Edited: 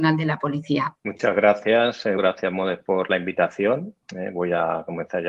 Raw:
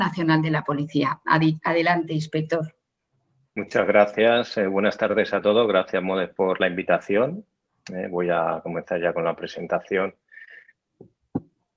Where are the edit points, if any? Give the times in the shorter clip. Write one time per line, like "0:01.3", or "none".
0:01.0
0:02.2
0:04.0